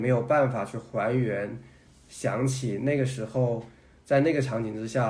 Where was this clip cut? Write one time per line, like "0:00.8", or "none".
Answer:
none

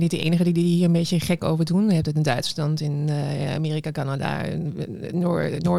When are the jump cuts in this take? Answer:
none

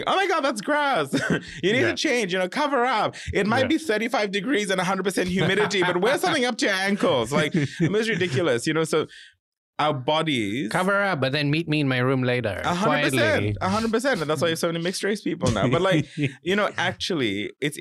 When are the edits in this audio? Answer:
none

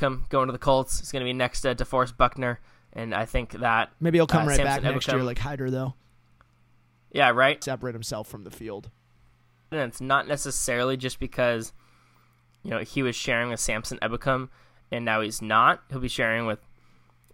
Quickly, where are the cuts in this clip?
0:07.6
0:09.7

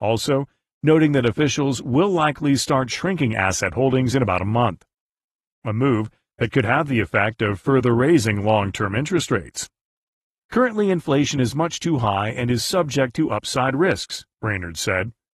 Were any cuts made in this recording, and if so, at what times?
none

